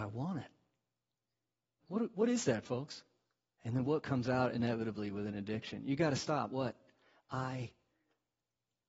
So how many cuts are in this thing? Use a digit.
2